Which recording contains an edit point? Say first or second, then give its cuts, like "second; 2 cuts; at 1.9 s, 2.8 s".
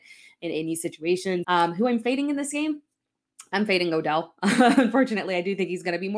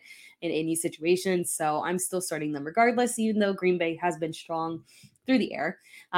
first; 1 cut; at 1.4 s